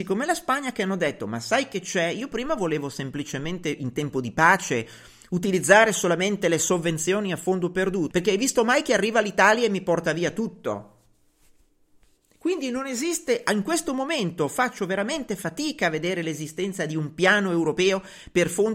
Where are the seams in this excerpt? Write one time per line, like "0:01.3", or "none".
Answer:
0:08.1